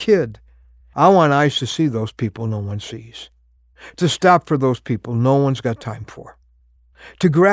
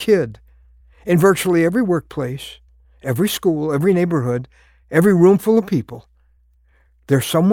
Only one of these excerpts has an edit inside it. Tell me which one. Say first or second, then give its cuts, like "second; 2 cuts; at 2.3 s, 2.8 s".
first; 1 cut; at 0.9 s